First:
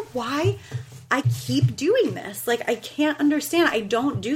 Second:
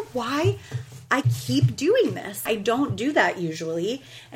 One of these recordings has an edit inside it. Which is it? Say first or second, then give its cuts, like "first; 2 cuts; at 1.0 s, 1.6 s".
second; 1 cut; at 2.5 s